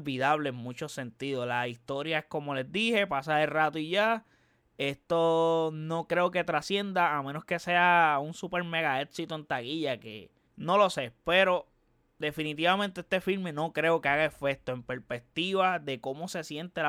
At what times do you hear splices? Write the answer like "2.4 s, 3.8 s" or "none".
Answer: 10.5 s